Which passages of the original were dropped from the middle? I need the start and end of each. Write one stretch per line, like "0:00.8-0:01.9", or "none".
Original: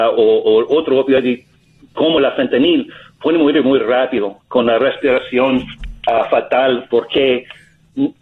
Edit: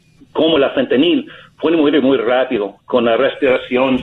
none